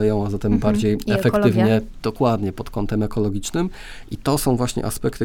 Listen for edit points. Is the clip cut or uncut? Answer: uncut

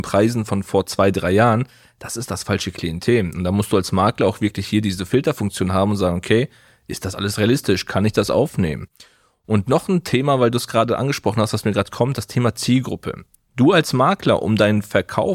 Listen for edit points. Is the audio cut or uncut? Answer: uncut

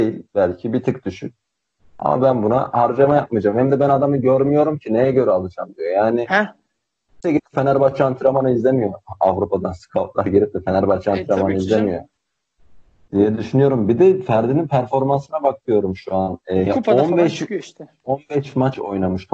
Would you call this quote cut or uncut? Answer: cut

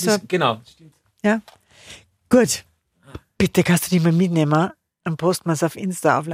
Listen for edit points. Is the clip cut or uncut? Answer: cut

